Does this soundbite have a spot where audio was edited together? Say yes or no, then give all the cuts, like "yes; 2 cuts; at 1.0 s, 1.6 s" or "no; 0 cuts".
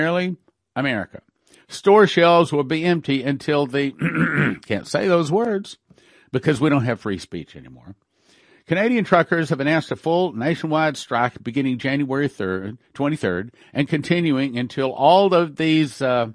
yes; 1 cut; at 1.6 s